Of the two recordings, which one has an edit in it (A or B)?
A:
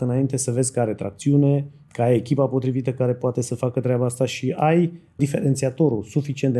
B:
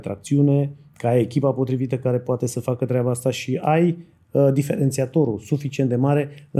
A